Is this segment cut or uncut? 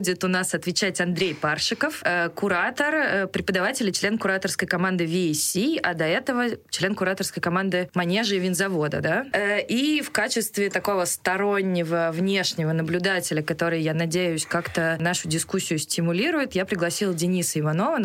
cut